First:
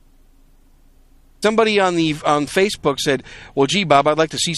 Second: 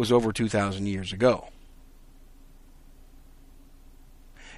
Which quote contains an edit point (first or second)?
first